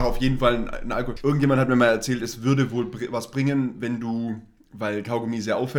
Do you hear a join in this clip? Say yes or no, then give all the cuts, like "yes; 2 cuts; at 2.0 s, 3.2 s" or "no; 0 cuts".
yes; 1 cut; at 1.2 s